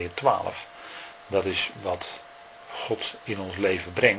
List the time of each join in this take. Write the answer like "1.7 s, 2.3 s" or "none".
none